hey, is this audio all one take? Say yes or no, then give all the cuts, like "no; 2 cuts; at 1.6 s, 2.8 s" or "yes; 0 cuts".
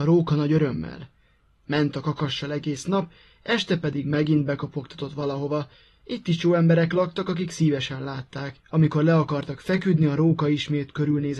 no; 1 cut; at 8.6 s